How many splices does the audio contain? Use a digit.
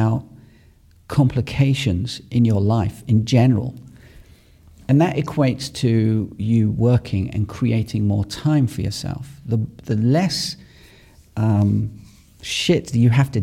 0